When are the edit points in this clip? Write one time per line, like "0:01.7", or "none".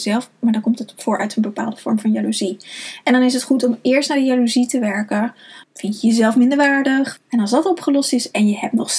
0:05.6
0:07.2

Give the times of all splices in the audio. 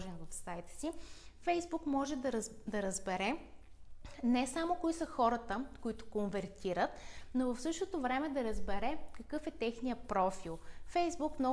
none

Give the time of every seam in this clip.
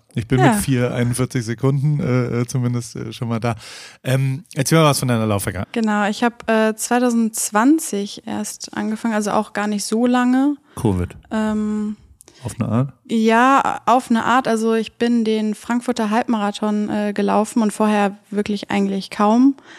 0:05.6

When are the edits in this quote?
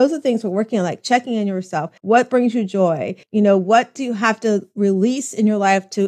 none

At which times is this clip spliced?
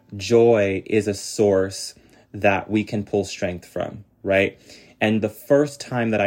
none

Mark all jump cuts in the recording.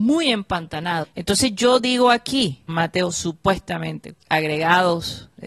0:01.0
0:02.7
0:04.1

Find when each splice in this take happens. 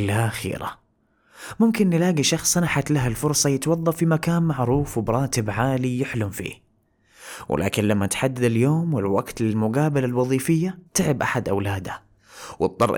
0:10.9

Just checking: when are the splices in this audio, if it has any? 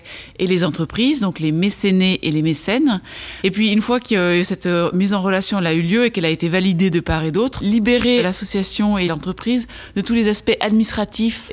0:07.6

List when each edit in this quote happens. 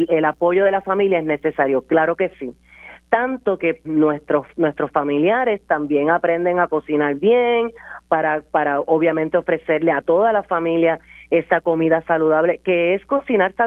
0:03.8

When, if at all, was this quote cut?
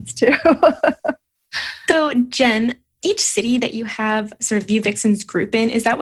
none

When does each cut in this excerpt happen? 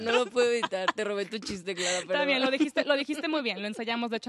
none

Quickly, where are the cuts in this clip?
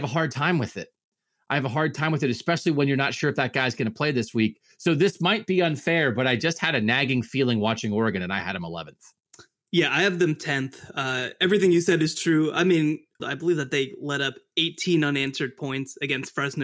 0:13.2

